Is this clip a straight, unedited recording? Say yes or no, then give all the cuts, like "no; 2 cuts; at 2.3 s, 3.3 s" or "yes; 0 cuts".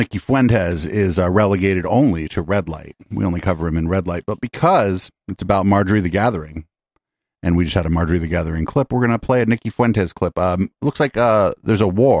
no; 1 cut; at 5.2 s